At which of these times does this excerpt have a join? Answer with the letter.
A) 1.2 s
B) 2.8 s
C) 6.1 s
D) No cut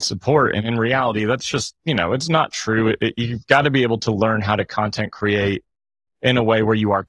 D